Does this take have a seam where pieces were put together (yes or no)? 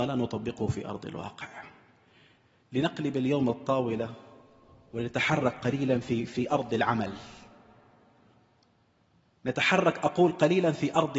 no